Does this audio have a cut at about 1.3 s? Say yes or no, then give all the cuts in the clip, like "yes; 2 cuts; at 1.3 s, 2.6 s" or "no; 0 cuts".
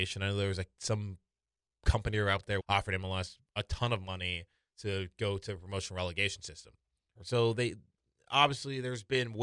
no; 2 cuts; at 2.6 s, 7.2 s